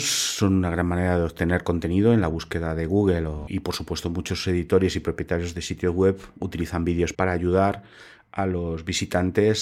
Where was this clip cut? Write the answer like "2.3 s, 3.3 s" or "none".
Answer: 3.5 s, 7.1 s

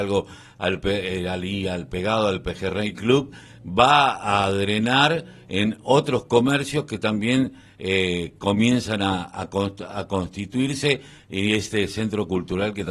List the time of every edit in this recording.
none

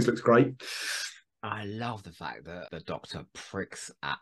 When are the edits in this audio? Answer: 2.7 s

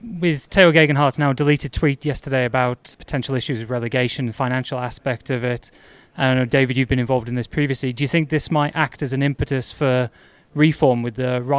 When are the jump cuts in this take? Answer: 2.9 s

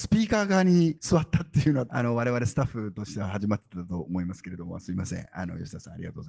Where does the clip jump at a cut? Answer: 1.9 s

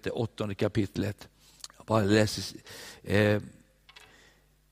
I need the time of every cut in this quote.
1.6 s

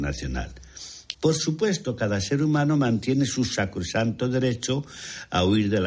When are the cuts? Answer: 1.1 s

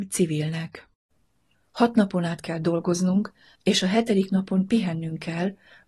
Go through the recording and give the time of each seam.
1.5 s, 3.6 s

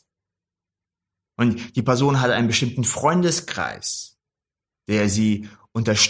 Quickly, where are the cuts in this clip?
1.2 s

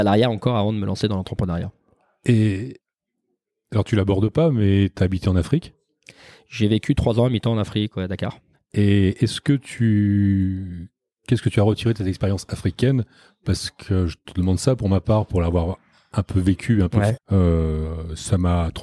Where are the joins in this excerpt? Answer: 8.5 s, 17.1 s

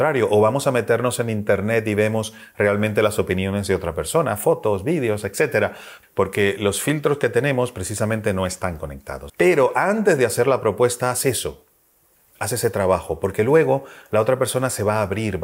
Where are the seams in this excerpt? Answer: 6.0 s, 9.3 s

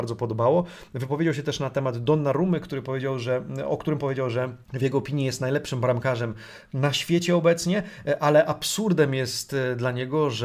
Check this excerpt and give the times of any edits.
4.6 s

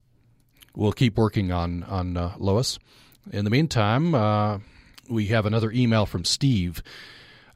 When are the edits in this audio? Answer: 4.9 s

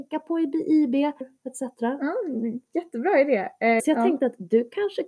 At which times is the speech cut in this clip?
1.2 s, 3.8 s

